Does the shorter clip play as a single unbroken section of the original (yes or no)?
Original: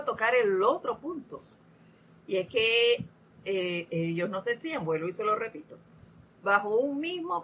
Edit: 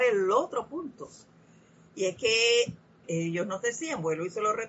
no